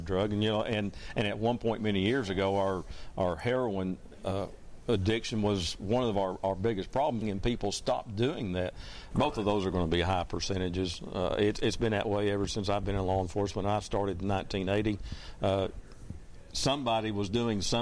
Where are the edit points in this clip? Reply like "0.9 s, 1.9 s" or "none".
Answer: 7.2 s, 9.1 s